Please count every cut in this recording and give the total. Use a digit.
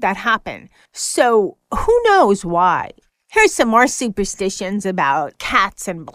1